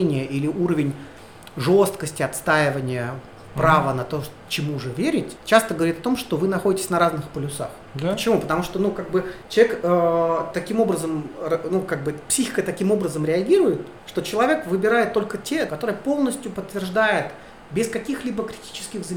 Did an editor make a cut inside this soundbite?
yes; 2 cuts; at 7.9 s, 15.7 s

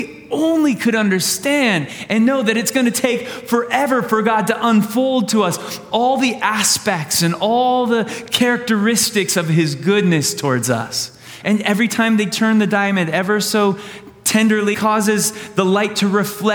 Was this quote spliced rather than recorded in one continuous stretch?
yes; 2 cuts; at 11.4 s, 14.7 s

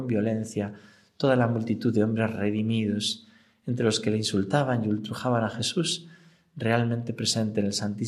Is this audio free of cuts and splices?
yes; 0 cuts

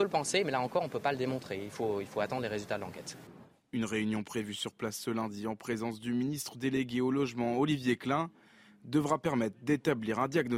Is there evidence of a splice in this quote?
no; 0 cuts

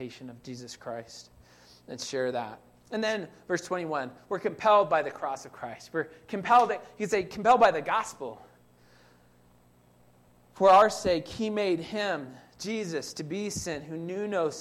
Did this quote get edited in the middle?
no; 0 cuts

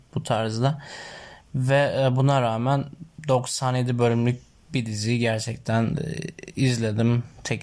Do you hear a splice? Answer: yes; 1 cut; at 1.5 s

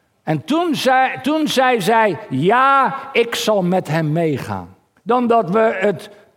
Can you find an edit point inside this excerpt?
yes; 2 cuts; at 1.2 s, 5.0 s

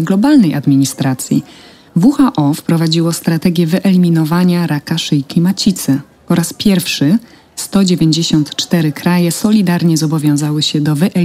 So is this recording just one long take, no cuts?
yes; 0 cuts

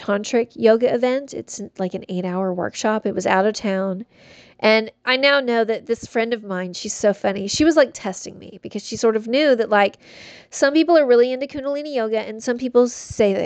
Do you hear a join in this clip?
no; 0 cuts

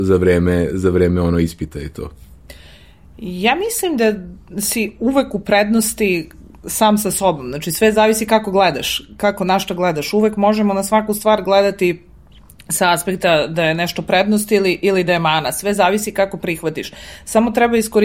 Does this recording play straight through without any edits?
yes; 0 cuts

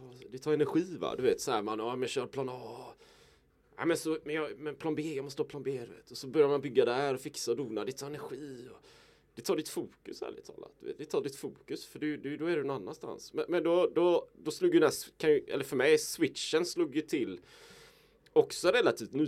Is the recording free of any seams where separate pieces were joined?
yes; 0 cuts

